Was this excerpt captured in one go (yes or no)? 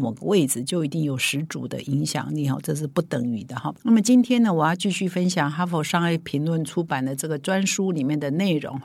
yes